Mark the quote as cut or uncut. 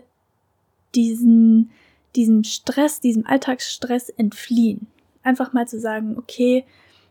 uncut